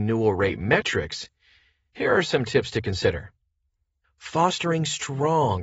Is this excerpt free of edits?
no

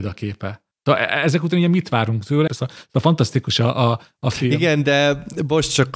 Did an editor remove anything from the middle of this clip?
yes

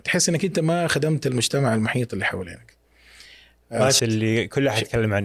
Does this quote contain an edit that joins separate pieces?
yes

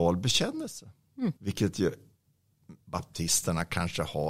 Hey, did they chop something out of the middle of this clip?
yes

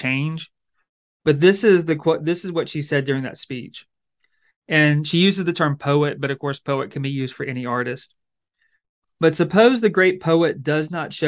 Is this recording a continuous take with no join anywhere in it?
yes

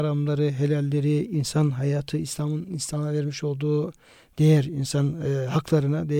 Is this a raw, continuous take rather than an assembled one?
yes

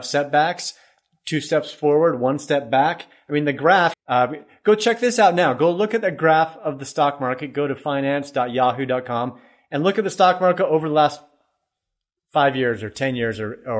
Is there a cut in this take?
yes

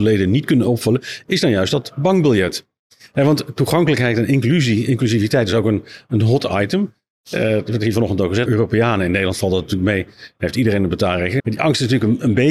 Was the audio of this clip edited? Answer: yes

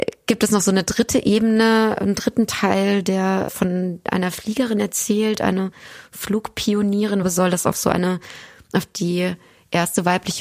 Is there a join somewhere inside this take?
yes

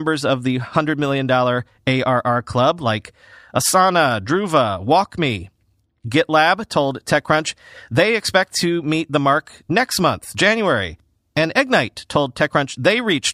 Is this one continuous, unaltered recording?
yes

